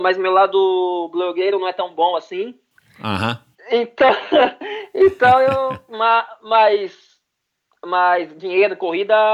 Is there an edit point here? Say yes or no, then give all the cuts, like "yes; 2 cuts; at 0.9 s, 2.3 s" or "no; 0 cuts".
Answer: no; 0 cuts